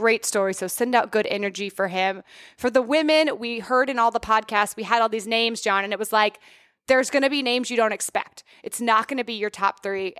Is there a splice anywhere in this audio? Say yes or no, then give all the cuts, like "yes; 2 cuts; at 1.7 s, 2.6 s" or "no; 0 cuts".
no; 0 cuts